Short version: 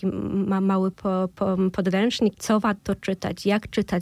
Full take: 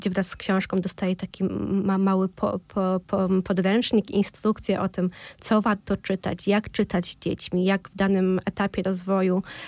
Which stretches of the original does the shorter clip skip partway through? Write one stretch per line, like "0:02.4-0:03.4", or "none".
0:02.3-0:02.6
0:04.1-0:05.4